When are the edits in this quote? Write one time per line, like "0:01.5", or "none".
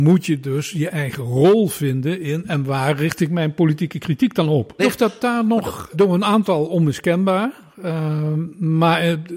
0:04.8
0:05.9

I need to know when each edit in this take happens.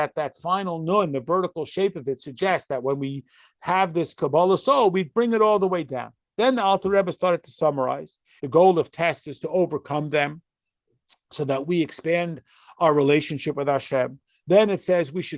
0:08.4

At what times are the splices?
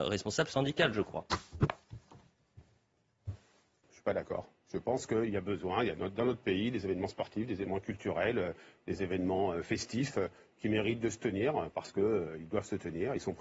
none

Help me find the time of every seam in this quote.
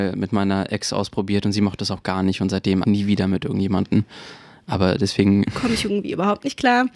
0:02.8
0:05.5

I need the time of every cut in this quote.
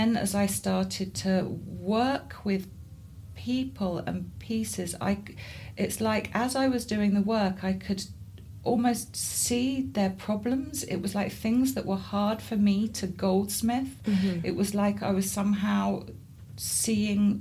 none

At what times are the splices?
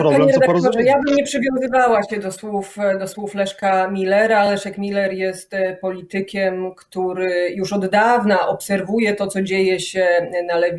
none

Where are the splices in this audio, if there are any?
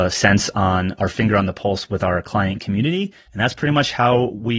0:03.3

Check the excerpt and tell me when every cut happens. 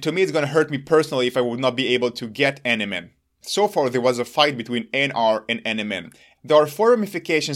0:03.4
0:06.3

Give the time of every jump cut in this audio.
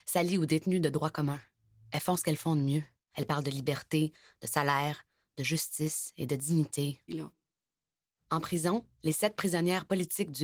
0:03.1
0:07.1
0:08.9

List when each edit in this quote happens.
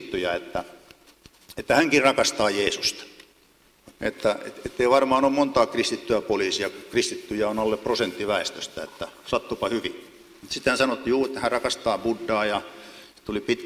0:03.9

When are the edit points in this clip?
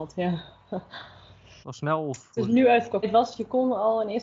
0:01.6
0:03.0

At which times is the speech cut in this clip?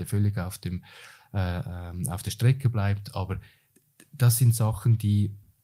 none

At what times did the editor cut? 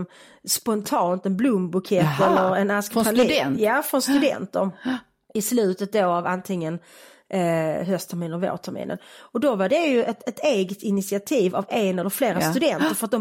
none

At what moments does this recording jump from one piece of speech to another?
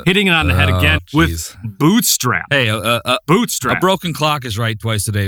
0:01.0

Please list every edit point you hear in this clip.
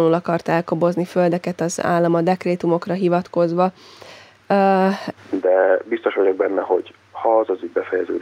0:05.2

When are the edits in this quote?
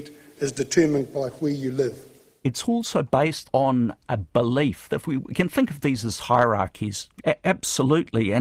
0:03.4
0:07.2

